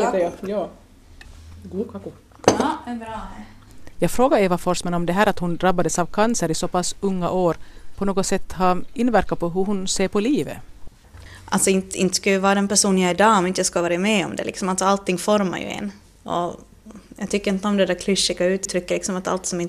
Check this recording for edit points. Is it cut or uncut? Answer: uncut